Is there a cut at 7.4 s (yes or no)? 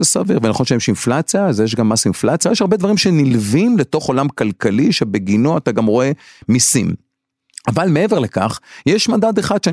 no